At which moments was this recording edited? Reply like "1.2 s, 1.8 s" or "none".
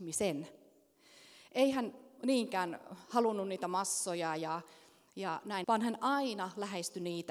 5.6 s